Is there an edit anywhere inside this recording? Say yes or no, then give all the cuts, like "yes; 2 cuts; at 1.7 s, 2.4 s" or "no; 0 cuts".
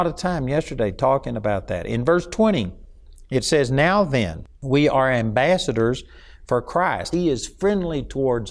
yes; 1 cut; at 7.1 s